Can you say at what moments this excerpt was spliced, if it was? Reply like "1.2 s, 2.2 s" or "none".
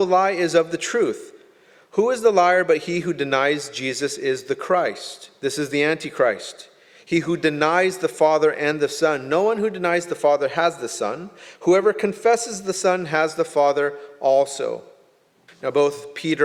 15.5 s